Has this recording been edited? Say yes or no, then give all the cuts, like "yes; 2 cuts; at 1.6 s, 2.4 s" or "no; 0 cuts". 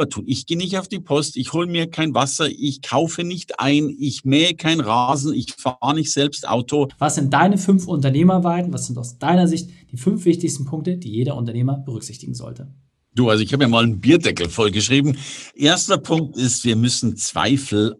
yes; 1 cut; at 6.9 s